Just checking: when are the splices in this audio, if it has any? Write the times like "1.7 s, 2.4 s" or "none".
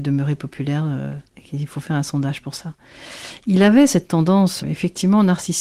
1.3 s, 4.6 s